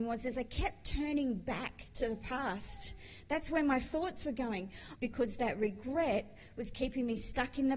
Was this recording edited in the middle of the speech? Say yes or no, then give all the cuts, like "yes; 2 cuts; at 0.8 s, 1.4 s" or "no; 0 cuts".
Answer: yes; 1 cut; at 5.0 s